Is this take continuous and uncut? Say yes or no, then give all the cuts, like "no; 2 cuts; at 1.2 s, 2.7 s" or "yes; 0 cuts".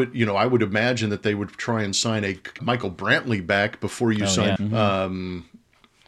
no; 2 cuts; at 2.6 s, 4.6 s